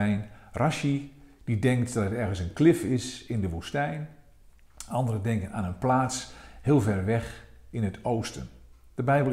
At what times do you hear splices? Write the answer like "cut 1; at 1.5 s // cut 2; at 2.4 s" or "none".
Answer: none